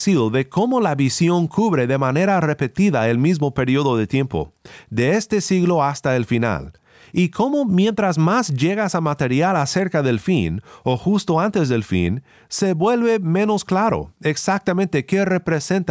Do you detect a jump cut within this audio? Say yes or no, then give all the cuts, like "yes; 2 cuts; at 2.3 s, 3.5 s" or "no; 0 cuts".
no; 0 cuts